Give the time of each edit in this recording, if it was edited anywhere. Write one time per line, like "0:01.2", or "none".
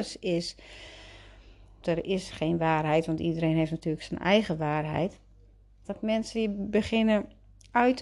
0:01.8
0:05.8